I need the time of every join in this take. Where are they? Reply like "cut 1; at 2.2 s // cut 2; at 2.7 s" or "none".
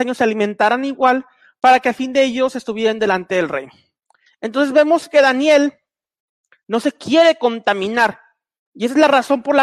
cut 1; at 4.3 s